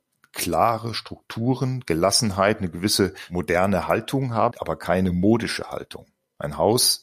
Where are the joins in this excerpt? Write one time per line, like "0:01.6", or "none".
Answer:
0:04.5